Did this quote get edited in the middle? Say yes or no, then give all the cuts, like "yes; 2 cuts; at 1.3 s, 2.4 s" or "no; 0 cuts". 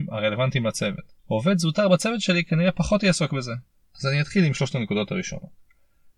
yes; 2 cuts; at 1.2 s, 3.8 s